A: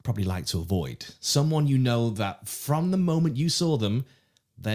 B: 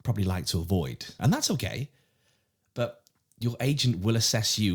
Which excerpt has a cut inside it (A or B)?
B